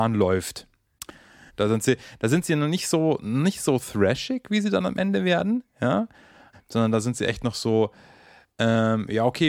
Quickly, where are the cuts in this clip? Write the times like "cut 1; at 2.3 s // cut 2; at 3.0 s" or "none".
cut 1; at 1.5 s // cut 2; at 6.5 s